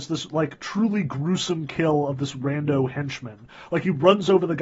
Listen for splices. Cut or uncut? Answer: uncut